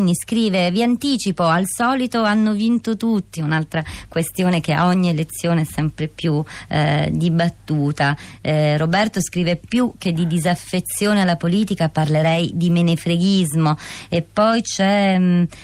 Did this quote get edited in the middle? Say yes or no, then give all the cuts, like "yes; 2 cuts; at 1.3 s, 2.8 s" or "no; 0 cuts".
no; 0 cuts